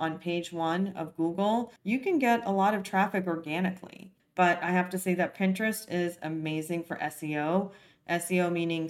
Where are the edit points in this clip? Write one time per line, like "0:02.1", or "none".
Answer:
0:04.2